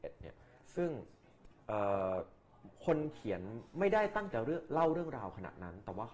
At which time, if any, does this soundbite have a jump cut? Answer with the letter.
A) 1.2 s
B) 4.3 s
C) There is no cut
B